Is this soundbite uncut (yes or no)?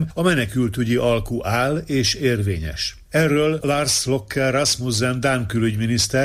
no